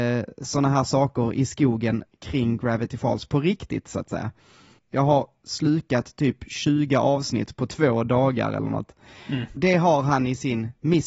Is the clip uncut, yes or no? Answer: no